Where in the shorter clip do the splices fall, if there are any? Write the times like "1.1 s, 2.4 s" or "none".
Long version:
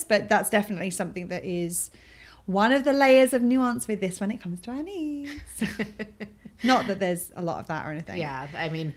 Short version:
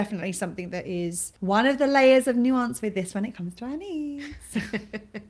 1.4 s

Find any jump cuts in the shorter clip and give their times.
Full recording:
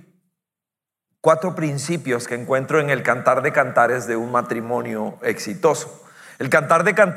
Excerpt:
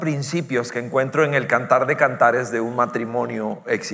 none

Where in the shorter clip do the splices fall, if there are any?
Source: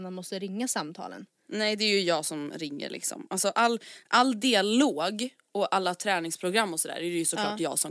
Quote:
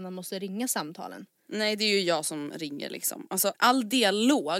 3.5 s

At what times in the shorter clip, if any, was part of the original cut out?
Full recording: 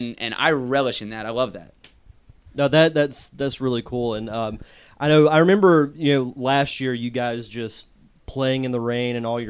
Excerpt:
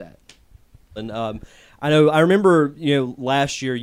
1.0 s

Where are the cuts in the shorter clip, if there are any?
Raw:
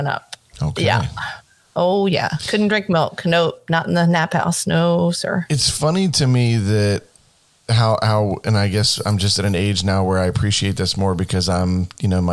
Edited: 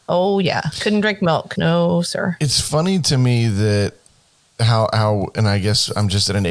1.6 s

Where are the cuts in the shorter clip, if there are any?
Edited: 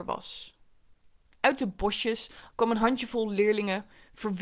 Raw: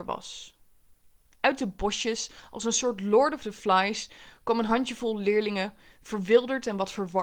2.5 s

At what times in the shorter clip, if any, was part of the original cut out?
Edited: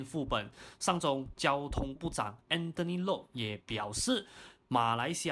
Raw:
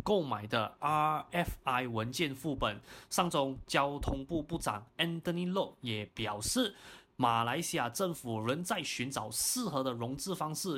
2.0 s

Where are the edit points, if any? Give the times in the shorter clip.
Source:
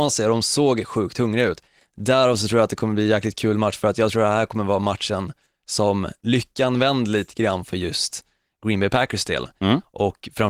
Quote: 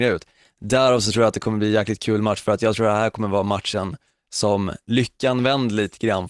none

